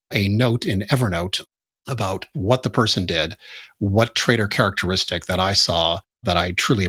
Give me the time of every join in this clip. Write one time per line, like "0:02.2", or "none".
none